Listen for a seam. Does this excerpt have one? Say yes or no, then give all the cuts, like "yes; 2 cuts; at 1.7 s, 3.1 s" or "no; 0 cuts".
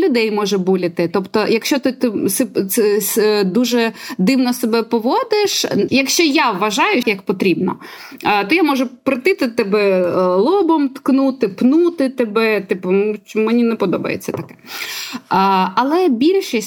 yes; 2 cuts; at 5.9 s, 7.0 s